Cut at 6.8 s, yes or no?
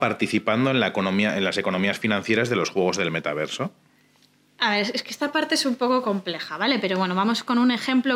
no